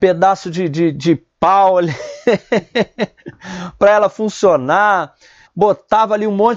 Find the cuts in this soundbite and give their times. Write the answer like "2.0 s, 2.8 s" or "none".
5.5 s